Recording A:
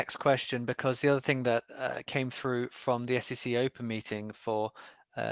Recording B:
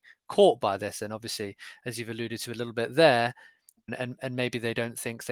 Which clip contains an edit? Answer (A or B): B